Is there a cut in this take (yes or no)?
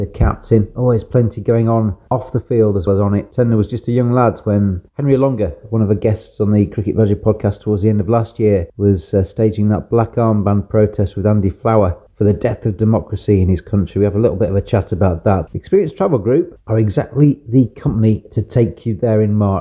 yes